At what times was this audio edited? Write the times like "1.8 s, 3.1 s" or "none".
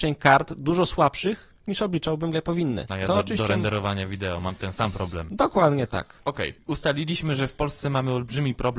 2.3 s